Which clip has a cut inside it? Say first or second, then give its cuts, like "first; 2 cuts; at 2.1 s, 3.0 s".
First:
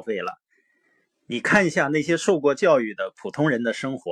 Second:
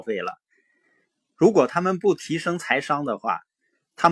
first; 1 cut; at 1.1 s